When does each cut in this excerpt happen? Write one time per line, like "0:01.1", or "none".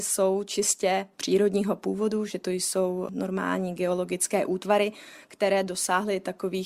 none